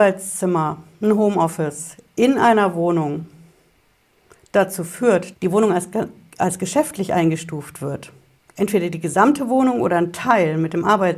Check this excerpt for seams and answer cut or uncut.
cut